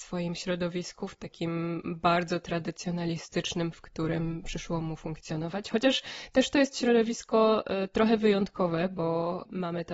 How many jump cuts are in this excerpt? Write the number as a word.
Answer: one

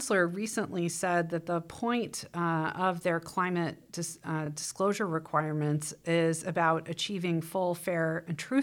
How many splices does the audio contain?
zero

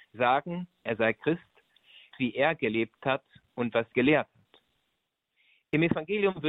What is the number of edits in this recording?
two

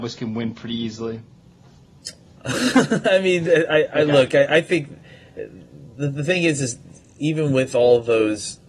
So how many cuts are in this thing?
one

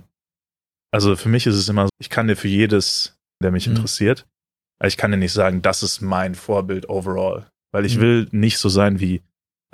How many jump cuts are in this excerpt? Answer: two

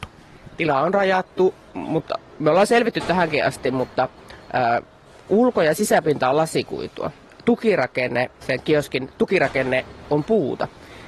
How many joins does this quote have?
one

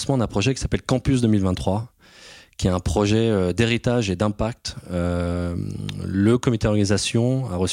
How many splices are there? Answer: zero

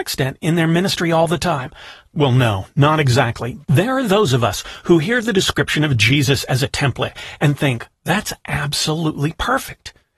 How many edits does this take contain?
three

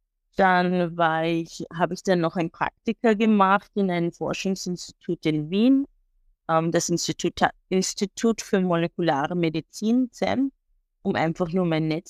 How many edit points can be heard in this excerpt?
zero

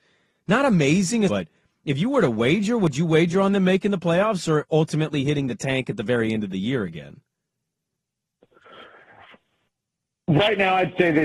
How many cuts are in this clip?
one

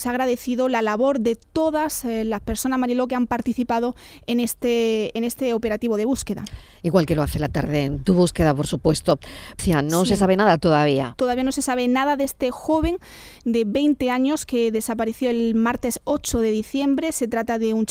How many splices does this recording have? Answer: one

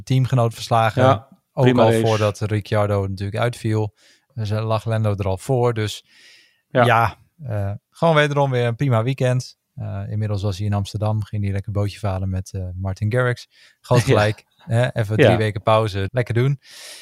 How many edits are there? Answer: one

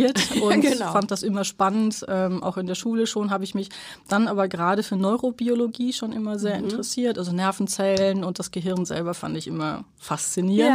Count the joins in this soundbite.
zero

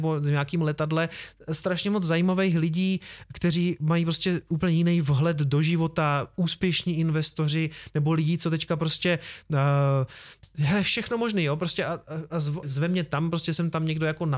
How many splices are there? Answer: one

